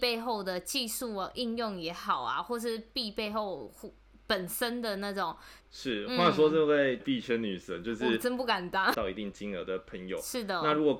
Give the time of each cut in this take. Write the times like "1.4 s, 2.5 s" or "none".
5.6 s, 7.0 s, 8.9 s